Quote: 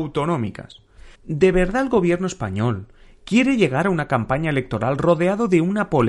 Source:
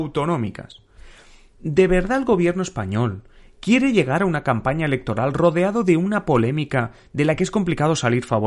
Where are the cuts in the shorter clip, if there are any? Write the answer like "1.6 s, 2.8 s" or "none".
1.1 s